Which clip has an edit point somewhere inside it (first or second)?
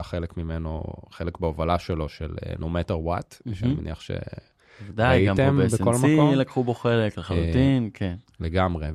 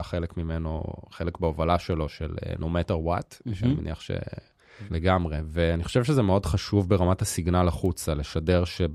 second